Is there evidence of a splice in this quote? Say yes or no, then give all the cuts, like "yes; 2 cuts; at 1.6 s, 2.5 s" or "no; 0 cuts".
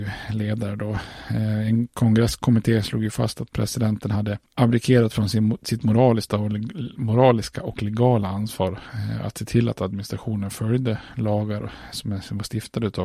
yes; 1 cut; at 4.5 s